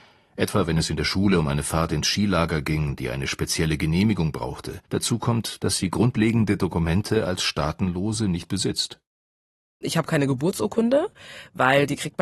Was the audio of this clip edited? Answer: yes; 1 cut; at 4.8 s

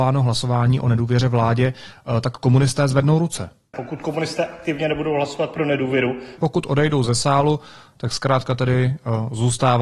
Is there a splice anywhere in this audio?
yes; 2 cuts; at 3.7 s, 6.4 s

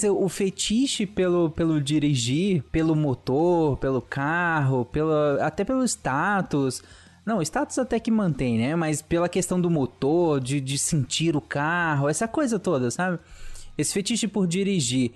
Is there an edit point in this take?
no; 0 cuts

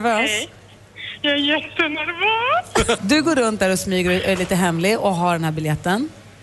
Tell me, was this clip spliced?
yes; 1 cut; at 3.0 s

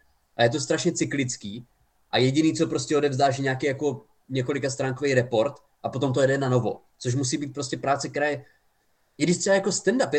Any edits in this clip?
no; 0 cuts

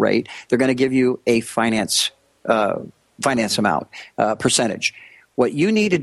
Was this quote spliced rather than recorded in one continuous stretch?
no; 0 cuts

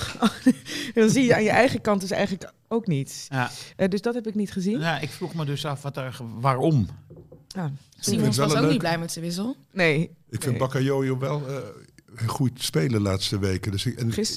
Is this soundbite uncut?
yes; 0 cuts

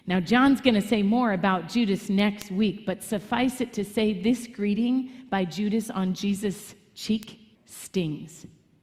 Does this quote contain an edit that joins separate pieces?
yes; 1 cut; at 7.6 s

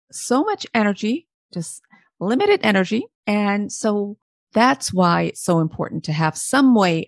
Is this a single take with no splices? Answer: no; 1 cut; at 3.1 s

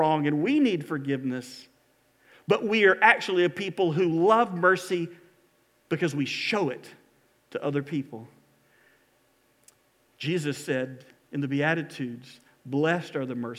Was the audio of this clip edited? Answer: no; 0 cuts

